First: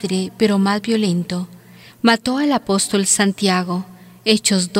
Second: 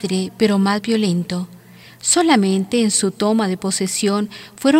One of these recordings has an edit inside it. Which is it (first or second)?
first